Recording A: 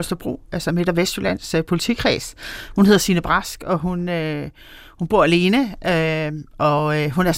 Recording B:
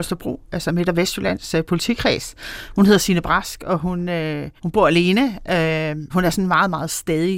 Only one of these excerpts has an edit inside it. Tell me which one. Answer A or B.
B